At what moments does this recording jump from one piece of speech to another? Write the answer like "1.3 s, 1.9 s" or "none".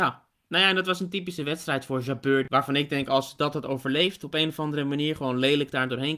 none